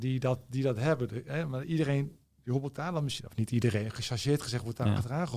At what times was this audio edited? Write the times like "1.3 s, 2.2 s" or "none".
none

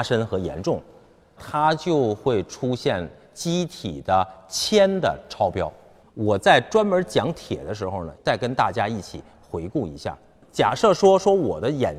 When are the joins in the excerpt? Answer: 1.4 s, 6.0 s, 8.2 s

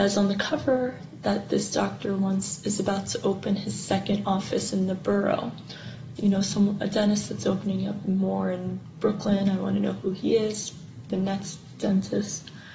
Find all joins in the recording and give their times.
6.2 s

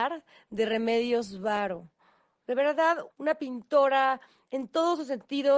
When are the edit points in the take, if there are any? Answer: 3.1 s

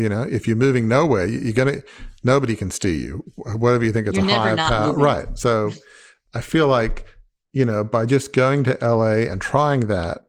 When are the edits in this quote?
none

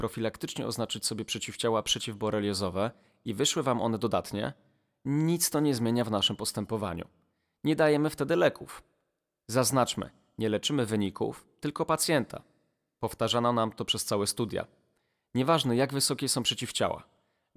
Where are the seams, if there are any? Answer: none

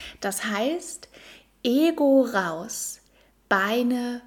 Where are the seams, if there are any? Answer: none

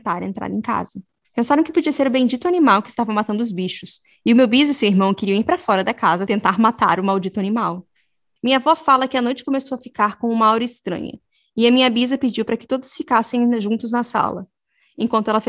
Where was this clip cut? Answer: 1.2 s, 8.4 s

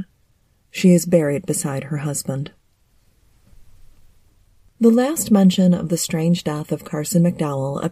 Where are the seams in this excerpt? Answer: none

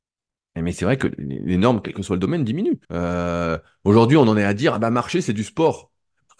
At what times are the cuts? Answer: 2.8 s

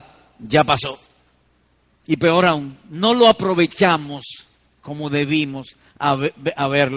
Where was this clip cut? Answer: none

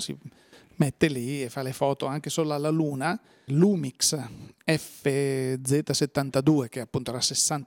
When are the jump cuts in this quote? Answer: 3.5 s

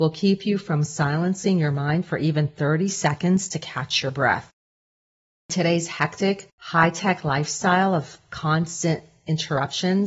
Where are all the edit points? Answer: none

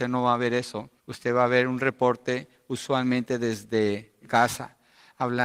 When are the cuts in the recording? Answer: 1.0 s

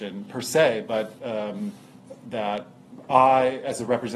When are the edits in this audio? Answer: 1.2 s

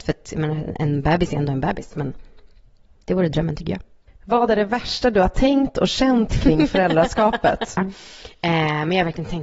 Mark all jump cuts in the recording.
7.8 s

